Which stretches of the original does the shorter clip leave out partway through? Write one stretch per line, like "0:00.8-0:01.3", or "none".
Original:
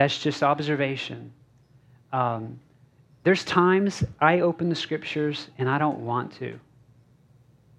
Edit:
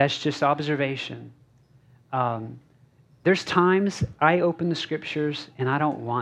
none